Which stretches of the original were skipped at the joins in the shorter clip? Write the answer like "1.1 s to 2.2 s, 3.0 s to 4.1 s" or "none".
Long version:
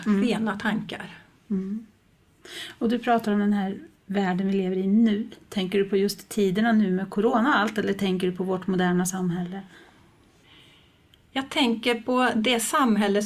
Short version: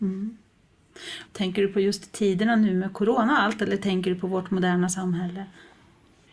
2.7 s to 5.4 s